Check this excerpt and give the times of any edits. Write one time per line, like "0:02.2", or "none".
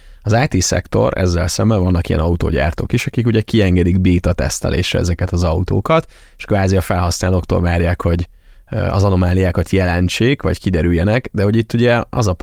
none